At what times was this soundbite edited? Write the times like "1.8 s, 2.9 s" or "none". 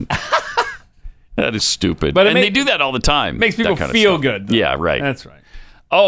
1.6 s